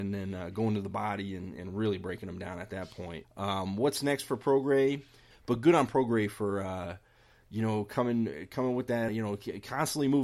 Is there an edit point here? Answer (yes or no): yes